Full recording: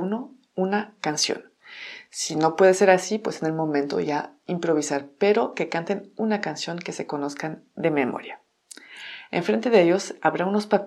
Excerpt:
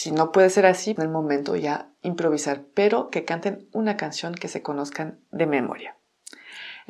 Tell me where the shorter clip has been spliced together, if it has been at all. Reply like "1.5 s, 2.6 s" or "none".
1.0 s